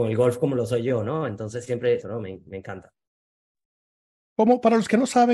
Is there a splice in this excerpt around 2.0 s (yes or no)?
yes